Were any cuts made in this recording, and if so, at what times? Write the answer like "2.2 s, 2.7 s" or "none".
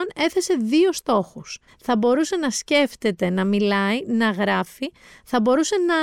1.7 s